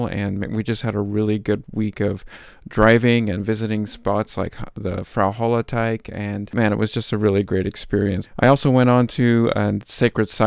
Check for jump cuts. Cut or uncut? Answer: cut